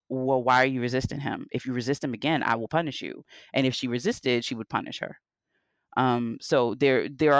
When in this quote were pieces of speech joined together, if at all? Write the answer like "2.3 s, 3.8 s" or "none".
none